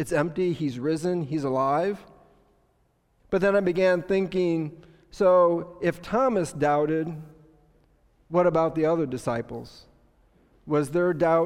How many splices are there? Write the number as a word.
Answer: one